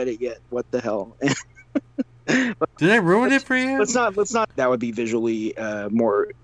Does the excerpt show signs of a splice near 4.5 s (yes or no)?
yes